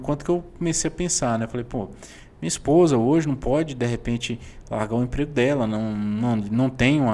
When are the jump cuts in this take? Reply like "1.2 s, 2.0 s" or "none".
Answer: none